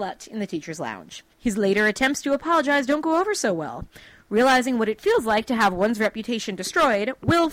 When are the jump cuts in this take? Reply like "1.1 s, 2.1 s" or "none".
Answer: 1.3 s